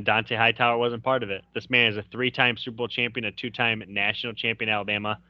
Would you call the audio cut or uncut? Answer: uncut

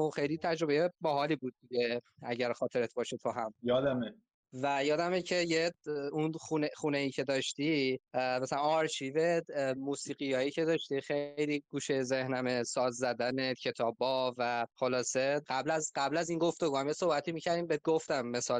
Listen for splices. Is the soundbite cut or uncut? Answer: uncut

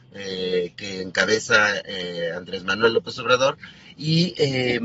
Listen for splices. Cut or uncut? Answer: uncut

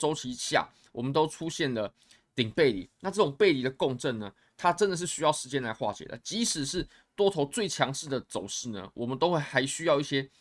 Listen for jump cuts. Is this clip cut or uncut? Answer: uncut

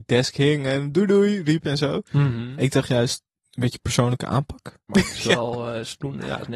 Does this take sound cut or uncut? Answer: cut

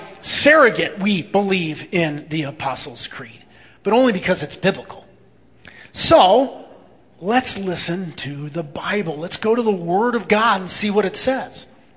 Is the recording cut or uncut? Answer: uncut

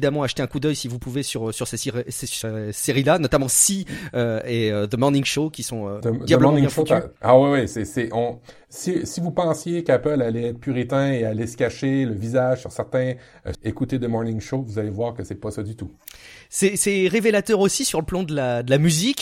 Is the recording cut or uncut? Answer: cut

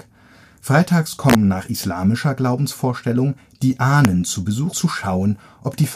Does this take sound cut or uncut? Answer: cut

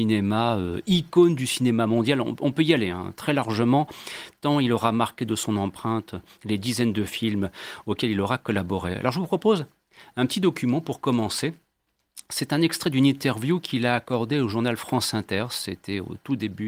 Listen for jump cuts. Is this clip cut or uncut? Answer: uncut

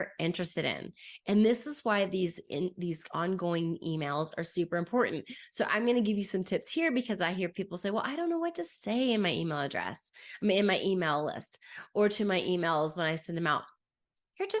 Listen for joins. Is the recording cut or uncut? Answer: uncut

